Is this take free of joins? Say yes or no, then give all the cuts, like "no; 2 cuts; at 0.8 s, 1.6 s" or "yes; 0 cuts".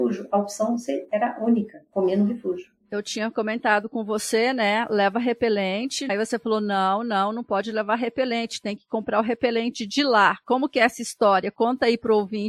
yes; 0 cuts